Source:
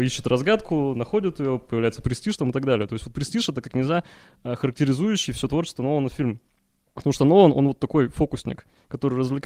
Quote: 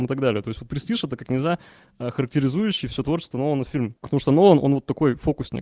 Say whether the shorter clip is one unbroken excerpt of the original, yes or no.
no